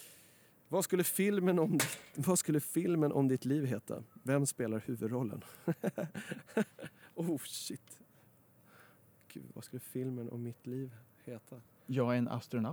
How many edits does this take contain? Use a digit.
1